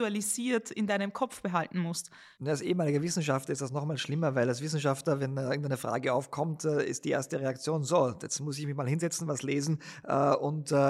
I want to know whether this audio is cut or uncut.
uncut